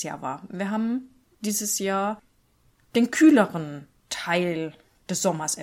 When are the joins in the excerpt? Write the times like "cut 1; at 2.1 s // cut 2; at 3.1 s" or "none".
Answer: cut 1; at 1.3 s